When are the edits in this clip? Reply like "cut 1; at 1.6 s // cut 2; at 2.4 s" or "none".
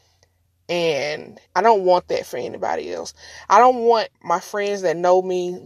cut 1; at 1.5 s // cut 2; at 4.1 s